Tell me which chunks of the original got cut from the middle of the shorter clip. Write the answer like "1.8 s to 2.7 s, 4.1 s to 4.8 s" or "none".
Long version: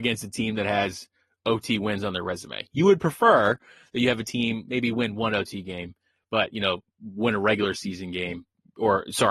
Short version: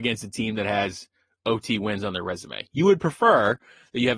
none